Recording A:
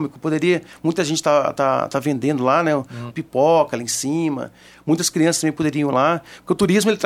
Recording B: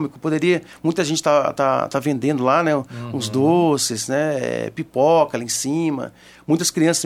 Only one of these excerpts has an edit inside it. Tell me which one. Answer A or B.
A